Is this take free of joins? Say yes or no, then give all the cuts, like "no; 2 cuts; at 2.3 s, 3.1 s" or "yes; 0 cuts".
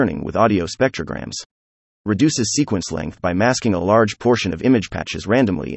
no; 1 cut; at 2.0 s